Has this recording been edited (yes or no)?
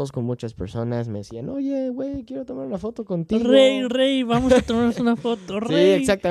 no